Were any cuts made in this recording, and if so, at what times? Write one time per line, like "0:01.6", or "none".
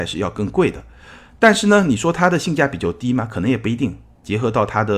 none